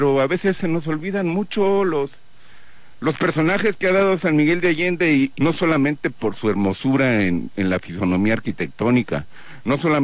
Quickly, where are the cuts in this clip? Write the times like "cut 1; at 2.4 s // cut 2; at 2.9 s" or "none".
cut 1; at 5.3 s